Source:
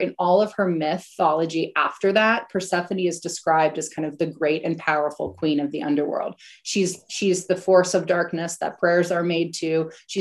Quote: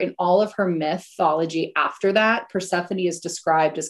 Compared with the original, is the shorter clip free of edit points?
yes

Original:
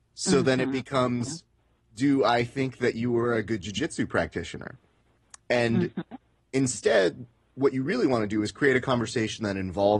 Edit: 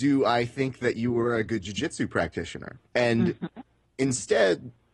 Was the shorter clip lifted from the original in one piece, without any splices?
no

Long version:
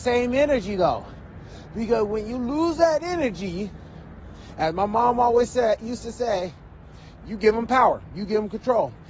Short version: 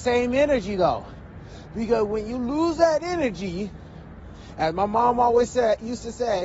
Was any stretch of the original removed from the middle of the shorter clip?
no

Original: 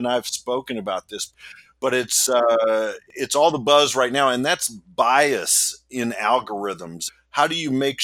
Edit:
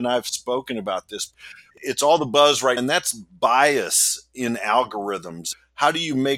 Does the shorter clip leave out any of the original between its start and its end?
yes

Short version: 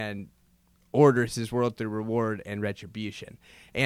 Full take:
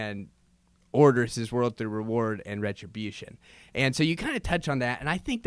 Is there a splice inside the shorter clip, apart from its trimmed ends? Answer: no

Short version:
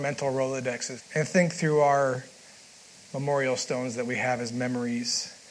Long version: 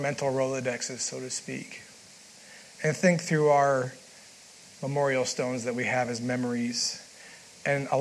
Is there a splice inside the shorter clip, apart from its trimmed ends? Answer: yes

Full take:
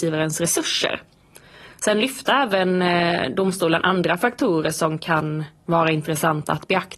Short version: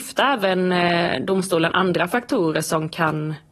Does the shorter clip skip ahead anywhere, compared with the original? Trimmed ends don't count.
no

